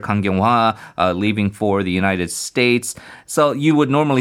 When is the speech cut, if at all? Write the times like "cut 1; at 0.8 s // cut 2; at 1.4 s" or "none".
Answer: none